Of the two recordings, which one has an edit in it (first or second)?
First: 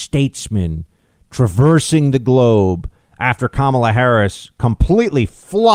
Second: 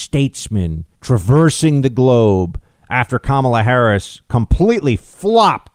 second